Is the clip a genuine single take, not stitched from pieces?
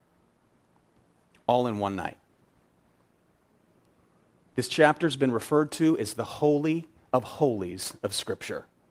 yes; 0 cuts

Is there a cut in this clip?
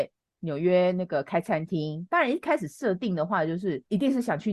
no; 0 cuts

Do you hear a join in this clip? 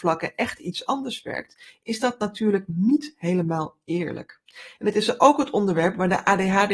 no; 0 cuts

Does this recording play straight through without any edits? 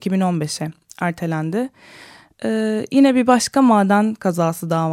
yes; 0 cuts

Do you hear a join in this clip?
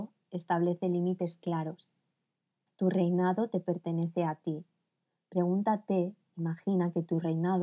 yes; 1 cut; at 2.7 s

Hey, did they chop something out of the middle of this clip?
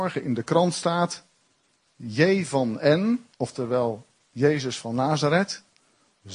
yes; 1 cut; at 3.3 s

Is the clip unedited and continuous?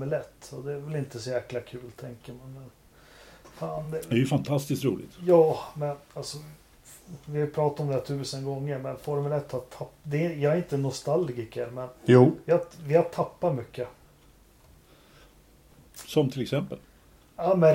yes; 0 cuts

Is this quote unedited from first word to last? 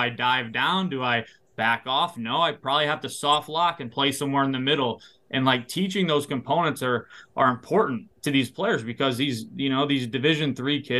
yes; 0 cuts

